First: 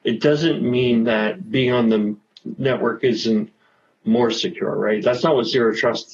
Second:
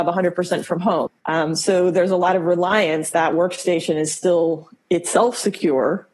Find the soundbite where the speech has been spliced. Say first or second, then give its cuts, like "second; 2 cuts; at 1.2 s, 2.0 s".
second; 2 cuts; at 1.1 s, 3.1 s